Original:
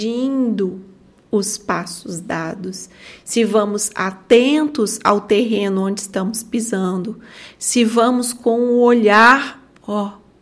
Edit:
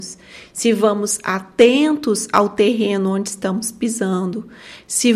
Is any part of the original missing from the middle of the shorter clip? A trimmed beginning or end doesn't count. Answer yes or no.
no